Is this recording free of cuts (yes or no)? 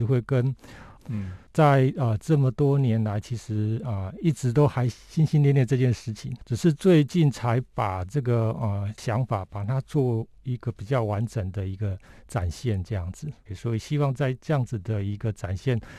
no